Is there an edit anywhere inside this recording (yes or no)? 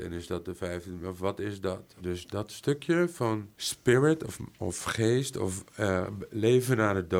yes